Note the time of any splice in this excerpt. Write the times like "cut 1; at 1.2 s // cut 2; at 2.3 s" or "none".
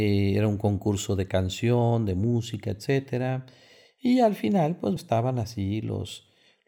cut 1; at 3.8 s // cut 2; at 5.0 s